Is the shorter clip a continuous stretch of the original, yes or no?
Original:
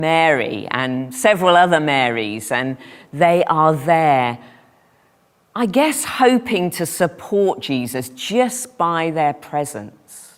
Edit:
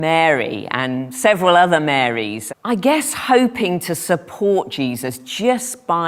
no